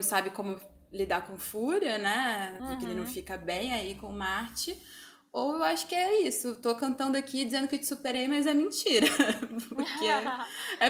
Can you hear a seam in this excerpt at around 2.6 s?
yes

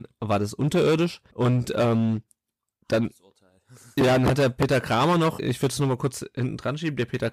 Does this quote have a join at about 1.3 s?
yes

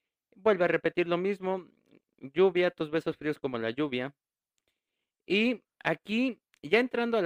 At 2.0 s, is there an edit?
no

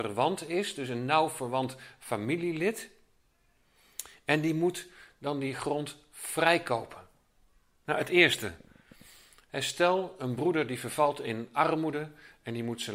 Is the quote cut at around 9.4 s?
no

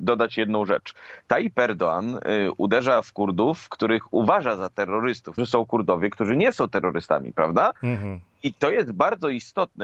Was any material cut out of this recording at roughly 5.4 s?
yes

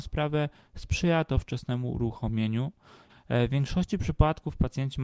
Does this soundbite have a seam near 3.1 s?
yes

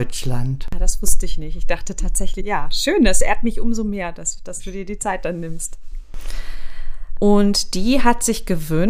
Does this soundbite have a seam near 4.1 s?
no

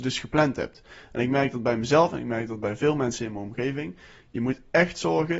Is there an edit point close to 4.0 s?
no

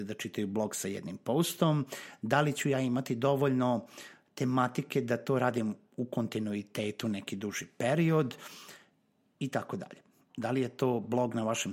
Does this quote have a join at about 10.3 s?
yes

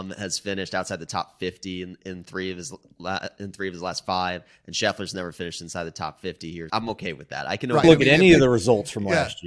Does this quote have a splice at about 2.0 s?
no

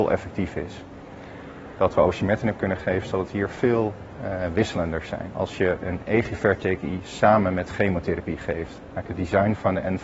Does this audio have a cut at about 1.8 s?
yes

